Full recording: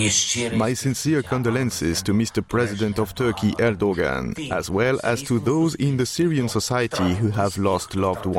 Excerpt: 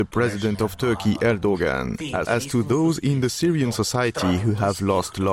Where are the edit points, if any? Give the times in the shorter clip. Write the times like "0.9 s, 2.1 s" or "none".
2.2 s